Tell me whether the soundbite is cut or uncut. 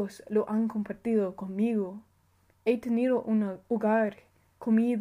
cut